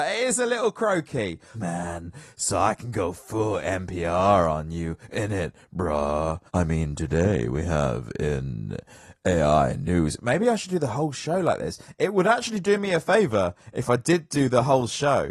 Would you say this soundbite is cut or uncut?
cut